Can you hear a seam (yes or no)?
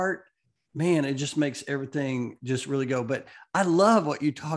no